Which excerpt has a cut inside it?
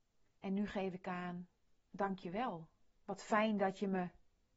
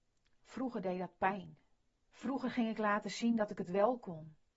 second; 1 cut; at 2.1 s

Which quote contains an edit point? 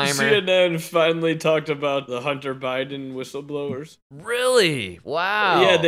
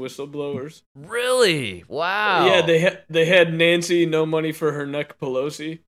first; 1 cut; at 2.1 s

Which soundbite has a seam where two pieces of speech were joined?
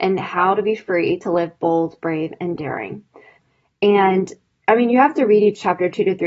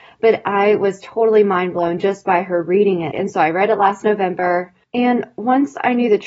second; 1 cut; at 3.1 s

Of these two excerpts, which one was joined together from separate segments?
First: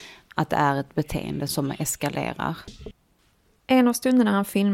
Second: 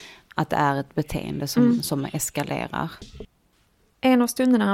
first; 1 cut; at 1.5 s

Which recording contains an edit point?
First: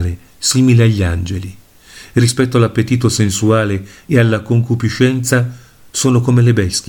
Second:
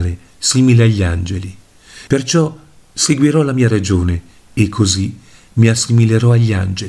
second; 1 cut; at 2.1 s

